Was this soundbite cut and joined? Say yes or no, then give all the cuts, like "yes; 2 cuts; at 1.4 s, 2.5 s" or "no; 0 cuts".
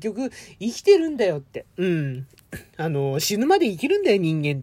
no; 0 cuts